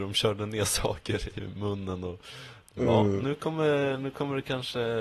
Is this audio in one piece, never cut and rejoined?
yes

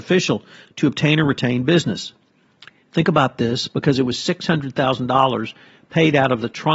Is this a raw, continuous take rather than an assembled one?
yes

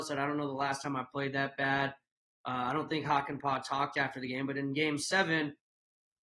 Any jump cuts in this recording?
no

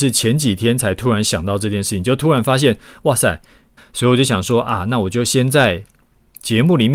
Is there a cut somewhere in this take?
yes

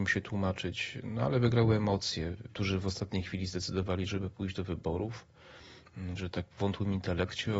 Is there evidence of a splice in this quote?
yes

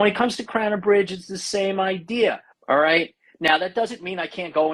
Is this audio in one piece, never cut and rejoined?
no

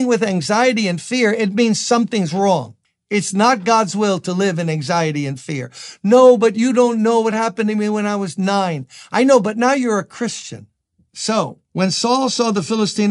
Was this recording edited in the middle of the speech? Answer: no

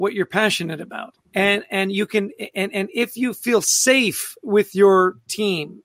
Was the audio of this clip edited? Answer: yes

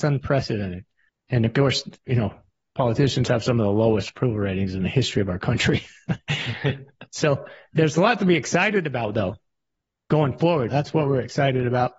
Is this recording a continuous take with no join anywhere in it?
no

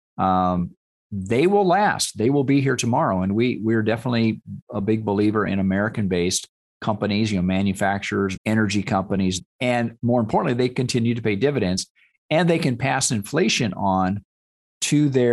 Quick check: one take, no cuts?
no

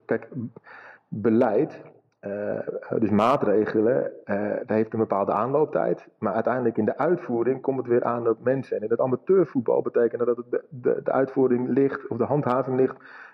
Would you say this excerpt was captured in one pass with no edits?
yes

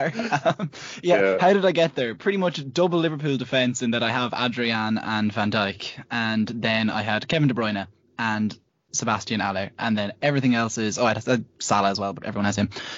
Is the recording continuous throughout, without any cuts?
yes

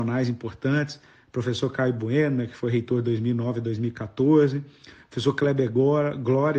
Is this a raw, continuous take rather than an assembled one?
yes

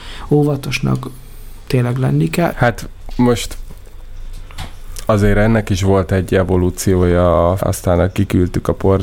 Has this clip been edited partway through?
yes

